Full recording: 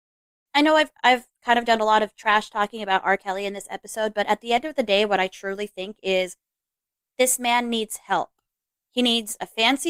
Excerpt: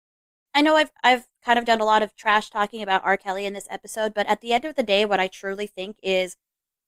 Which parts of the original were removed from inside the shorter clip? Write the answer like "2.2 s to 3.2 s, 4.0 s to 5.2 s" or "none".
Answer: none